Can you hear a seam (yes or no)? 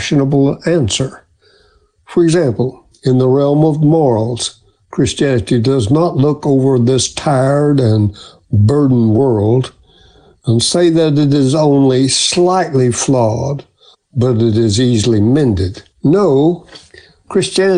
yes